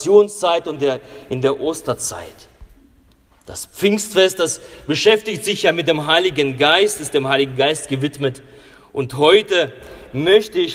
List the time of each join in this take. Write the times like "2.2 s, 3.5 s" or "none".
none